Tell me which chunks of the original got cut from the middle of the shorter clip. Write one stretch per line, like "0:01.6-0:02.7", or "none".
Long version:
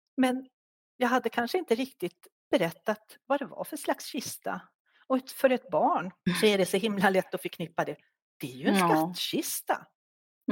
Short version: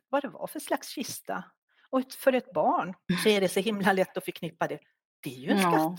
none